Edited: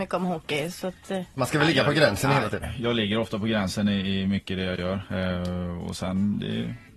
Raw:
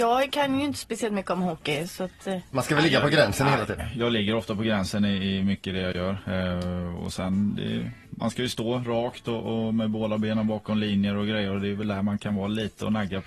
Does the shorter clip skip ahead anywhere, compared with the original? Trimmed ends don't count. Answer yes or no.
no